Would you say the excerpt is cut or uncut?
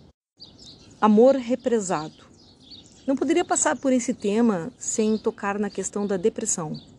uncut